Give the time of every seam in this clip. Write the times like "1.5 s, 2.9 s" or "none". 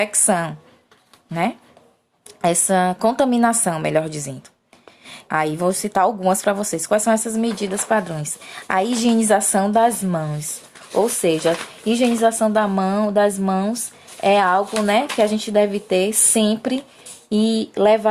5.3 s